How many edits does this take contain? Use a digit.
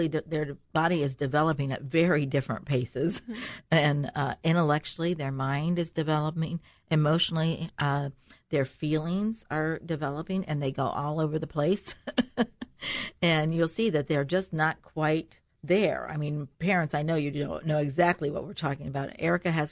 0